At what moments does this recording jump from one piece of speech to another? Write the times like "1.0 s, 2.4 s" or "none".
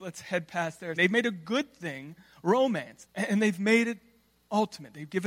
1.0 s, 3.0 s